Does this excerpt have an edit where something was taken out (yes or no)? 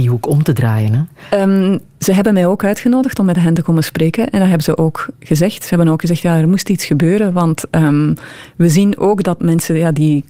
yes